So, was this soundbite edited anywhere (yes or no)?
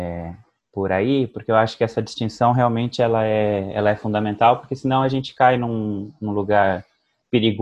no